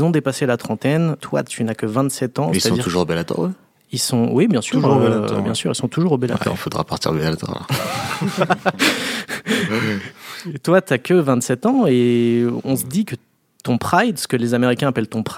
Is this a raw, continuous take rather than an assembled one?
yes; 0 cuts

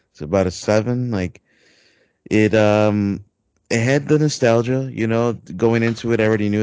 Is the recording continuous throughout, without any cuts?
yes; 0 cuts

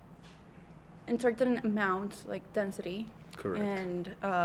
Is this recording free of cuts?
yes; 0 cuts

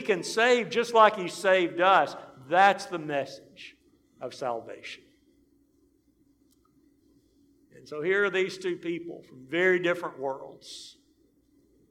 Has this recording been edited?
no; 0 cuts

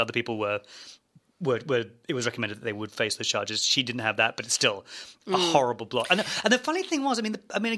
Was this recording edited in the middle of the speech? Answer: no; 0 cuts

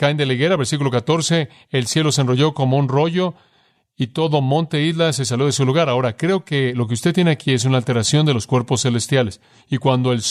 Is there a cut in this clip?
no; 0 cuts

